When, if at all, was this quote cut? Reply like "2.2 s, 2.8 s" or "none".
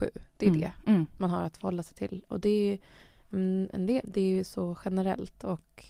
4.0 s